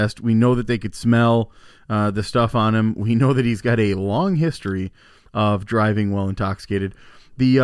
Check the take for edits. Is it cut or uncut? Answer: uncut